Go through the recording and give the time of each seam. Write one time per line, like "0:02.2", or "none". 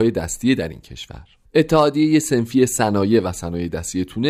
0:01.4

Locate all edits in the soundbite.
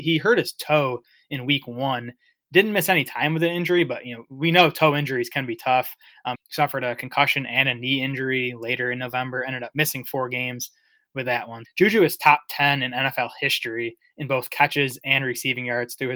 0:06.3
0:11.6

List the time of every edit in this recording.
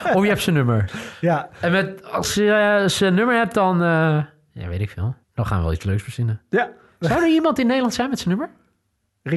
0:05.2

